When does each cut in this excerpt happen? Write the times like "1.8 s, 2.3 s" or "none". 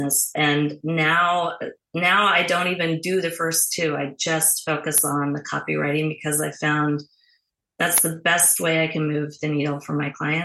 none